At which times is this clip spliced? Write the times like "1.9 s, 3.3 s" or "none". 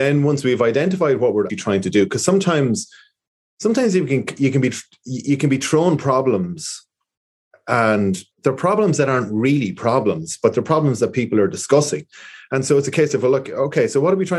1.5 s, 8.3 s